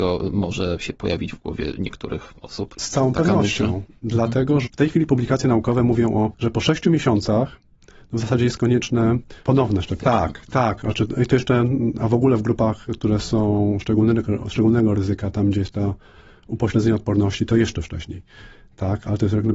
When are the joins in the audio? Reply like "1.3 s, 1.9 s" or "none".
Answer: 4.6 s, 10.0 s